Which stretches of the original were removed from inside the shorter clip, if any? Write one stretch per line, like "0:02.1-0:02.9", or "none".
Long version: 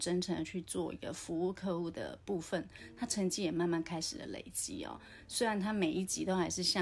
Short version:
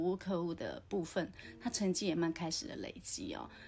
0:03.5-0:03.7